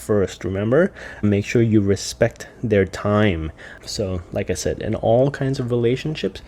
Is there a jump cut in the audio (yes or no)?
yes